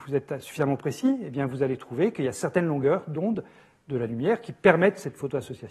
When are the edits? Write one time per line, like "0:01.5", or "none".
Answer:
none

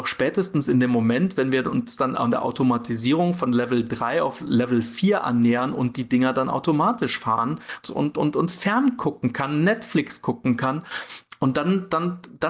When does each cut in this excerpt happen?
0:07.8

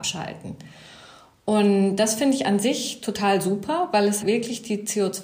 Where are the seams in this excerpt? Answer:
0:04.2

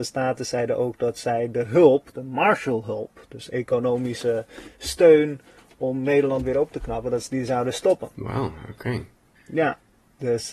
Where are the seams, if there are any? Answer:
none

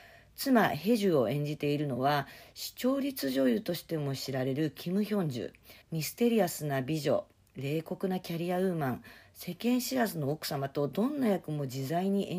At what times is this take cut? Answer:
0:05.8

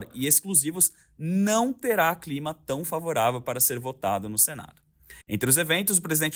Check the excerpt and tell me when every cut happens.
0:05.2

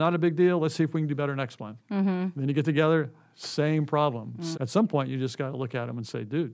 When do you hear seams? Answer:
0:04.5

